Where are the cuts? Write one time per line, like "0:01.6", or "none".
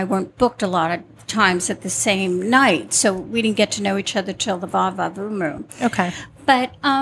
none